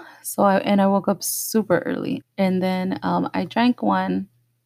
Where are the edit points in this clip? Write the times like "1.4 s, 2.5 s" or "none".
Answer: 2.2 s

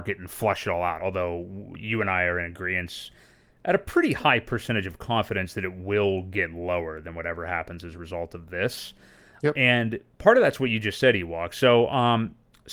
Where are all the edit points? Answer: 1.0 s

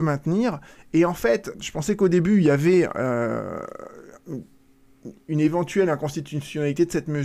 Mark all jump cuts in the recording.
1.5 s

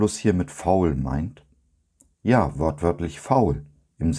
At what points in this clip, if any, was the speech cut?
none

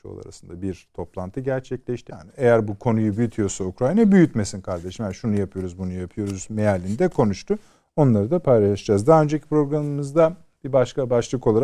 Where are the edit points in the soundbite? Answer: 2.1 s

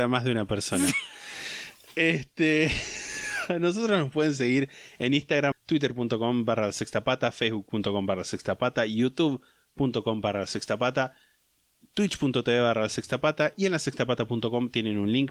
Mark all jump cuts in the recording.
5.5 s

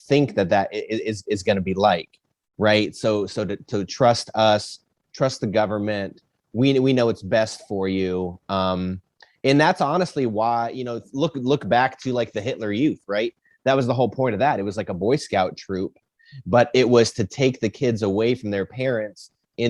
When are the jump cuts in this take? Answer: none

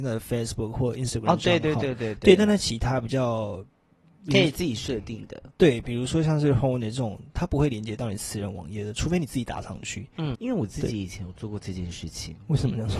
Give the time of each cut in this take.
10.3 s

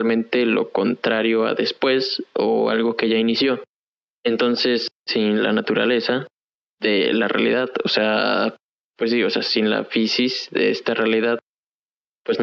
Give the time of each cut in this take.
none

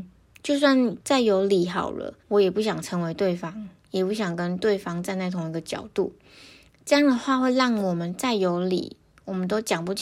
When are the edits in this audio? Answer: 2.2 s

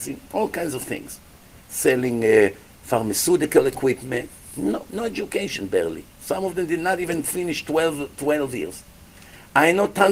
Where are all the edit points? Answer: none

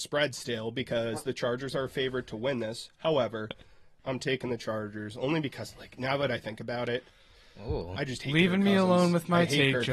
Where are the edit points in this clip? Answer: 4.0 s

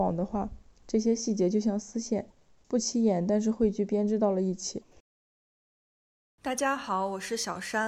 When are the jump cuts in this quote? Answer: 6.4 s

